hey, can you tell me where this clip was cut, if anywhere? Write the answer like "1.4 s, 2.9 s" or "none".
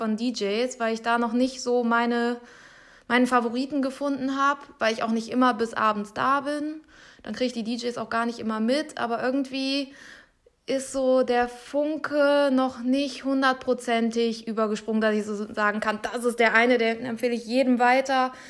none